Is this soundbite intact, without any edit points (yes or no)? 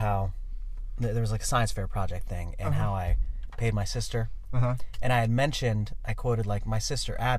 yes